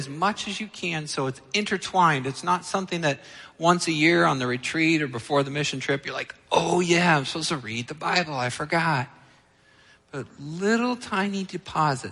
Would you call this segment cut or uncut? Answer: uncut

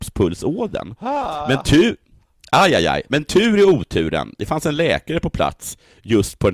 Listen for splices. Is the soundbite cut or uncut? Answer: uncut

